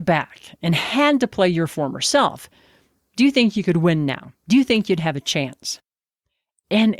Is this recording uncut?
yes; 0 cuts

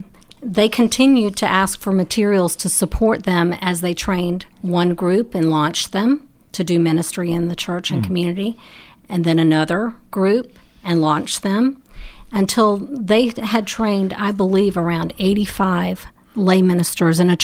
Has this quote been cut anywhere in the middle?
yes; 1 cut; at 4.5 s

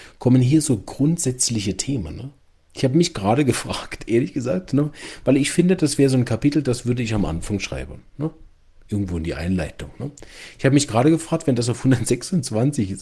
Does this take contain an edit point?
no; 0 cuts

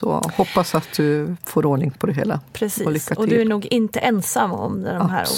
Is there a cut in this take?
no; 0 cuts

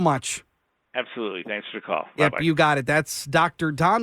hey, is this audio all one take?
yes; 0 cuts

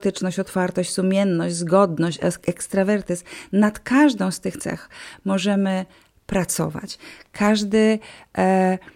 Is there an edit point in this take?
yes; 1 cut; at 7.3 s

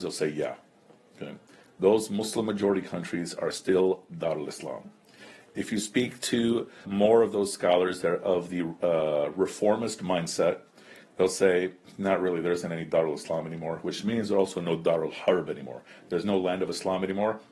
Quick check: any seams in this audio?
yes; 1 cut; at 6.8 s

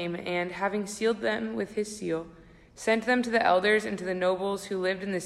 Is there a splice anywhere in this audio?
no; 0 cuts

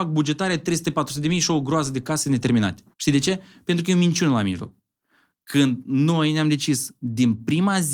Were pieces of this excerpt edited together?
yes; 1 cut; at 2.9 s

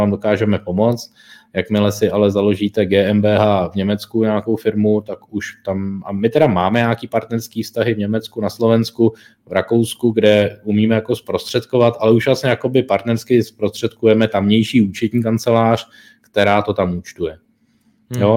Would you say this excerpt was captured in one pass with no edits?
yes; 0 cuts

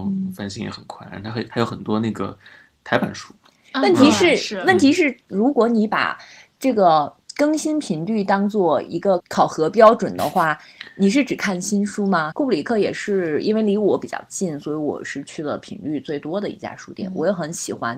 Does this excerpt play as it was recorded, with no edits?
no; 2 cuts; at 9.2 s, 12.3 s

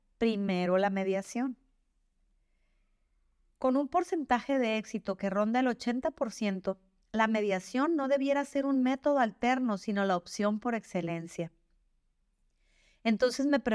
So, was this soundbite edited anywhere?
no; 0 cuts

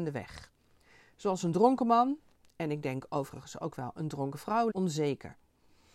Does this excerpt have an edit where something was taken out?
yes; 1 cut; at 4.7 s

